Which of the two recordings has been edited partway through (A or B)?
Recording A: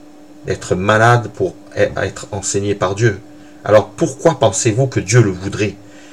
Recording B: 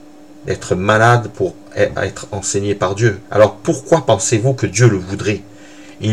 B